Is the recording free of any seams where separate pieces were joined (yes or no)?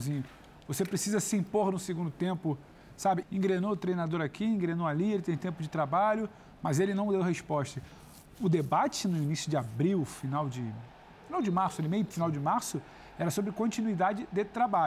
no